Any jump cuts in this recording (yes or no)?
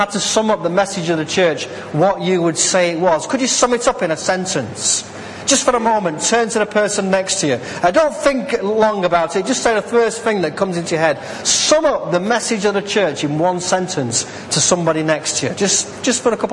no